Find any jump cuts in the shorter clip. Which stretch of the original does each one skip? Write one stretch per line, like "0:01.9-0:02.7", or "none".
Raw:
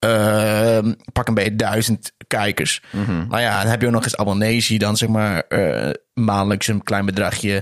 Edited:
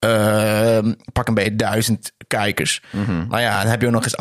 none